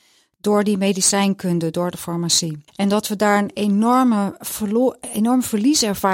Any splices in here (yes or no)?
yes